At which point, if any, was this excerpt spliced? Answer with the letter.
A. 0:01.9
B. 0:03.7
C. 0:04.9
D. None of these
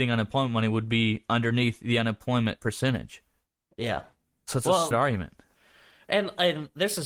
C